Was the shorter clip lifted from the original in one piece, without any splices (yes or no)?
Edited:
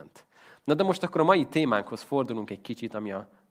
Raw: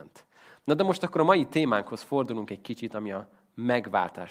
yes